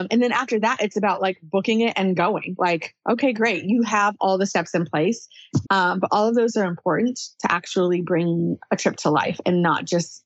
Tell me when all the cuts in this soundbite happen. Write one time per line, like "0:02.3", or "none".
0:05.6